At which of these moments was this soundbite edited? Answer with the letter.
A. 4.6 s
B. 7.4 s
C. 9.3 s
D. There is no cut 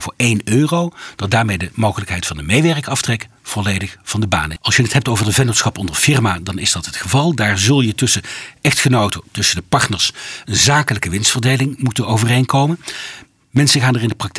A